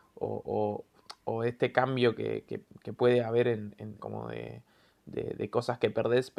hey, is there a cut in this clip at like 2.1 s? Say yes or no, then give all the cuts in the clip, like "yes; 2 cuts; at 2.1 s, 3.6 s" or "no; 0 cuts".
no; 1 cut; at 4.0 s